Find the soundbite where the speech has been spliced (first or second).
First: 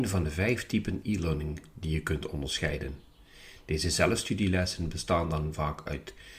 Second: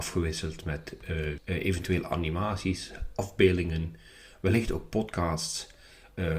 second